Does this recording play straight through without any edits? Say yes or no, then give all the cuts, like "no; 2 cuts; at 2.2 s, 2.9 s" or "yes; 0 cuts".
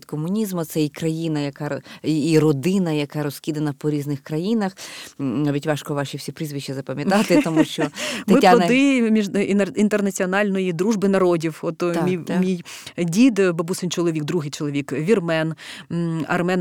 yes; 0 cuts